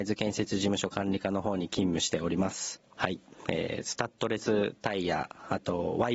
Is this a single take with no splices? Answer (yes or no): no